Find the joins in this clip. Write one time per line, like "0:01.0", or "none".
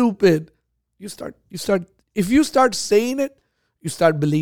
none